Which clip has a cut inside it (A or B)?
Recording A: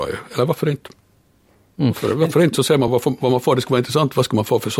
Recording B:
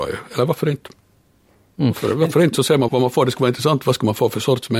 B